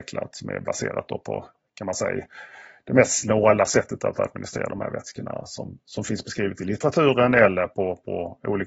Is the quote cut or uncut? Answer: uncut